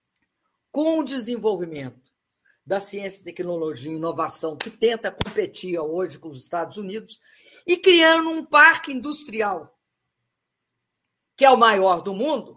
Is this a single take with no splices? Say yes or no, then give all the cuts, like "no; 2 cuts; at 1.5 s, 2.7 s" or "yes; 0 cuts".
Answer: yes; 0 cuts